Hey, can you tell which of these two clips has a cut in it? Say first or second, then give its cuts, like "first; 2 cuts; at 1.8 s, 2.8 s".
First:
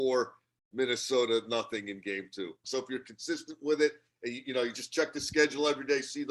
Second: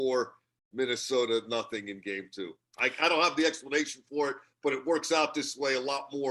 first; 1 cut; at 2.6 s